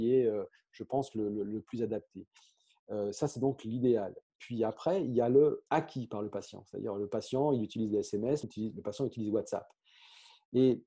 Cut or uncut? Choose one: cut